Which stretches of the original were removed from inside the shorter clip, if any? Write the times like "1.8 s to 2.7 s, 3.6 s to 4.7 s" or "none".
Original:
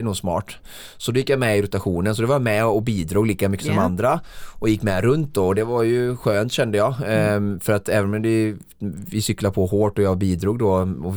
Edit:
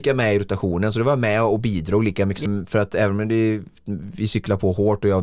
3.7 s to 7.4 s